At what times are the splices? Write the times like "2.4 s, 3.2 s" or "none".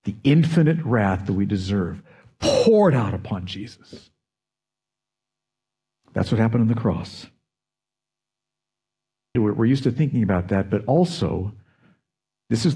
9.3 s